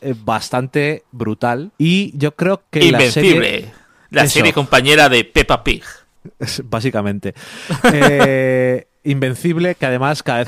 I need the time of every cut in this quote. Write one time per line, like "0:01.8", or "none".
0:01.7